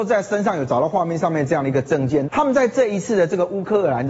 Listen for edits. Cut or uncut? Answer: cut